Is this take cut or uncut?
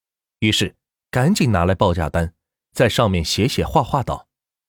uncut